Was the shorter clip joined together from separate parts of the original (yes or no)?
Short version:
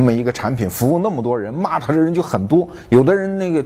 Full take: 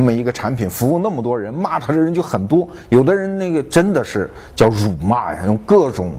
no